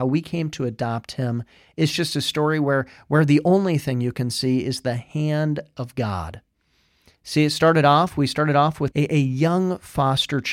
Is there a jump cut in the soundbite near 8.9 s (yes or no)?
yes